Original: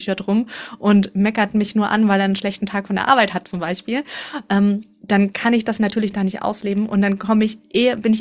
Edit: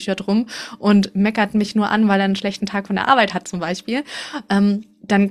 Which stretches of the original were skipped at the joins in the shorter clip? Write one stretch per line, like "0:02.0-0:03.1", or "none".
none